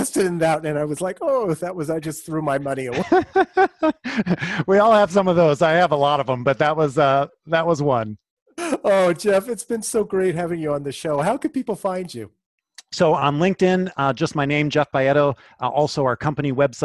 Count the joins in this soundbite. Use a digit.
0